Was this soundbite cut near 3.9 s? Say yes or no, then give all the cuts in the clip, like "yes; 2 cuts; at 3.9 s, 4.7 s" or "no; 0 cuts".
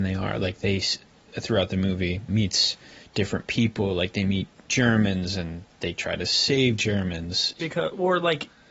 no; 2 cuts; at 2.3 s, 7.6 s